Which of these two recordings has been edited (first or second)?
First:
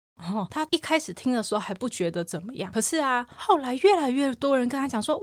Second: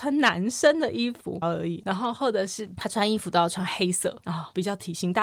second